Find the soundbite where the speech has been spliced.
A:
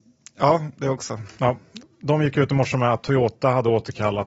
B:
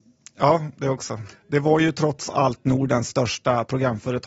B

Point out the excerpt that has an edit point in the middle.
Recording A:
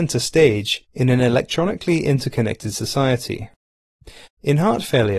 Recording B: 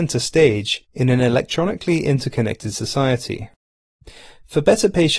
A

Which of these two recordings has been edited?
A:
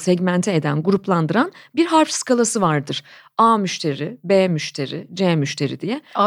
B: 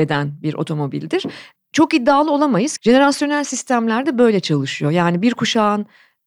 B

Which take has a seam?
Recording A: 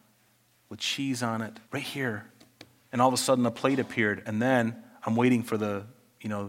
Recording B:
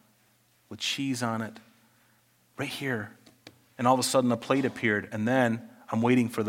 A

